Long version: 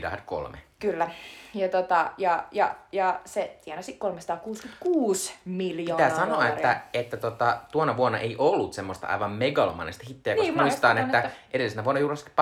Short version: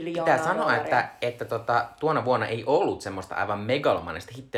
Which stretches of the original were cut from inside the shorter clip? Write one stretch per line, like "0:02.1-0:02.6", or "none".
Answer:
none